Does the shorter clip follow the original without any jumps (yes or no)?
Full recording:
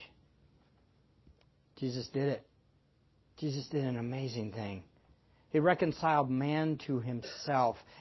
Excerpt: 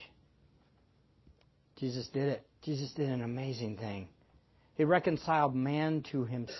no